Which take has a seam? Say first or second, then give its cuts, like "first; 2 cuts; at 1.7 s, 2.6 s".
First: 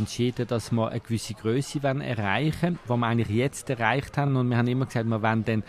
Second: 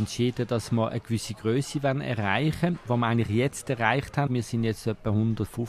second; 1 cut; at 4.3 s